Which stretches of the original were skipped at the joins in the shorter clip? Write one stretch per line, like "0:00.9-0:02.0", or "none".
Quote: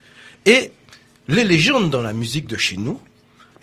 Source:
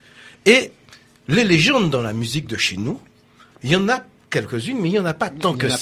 none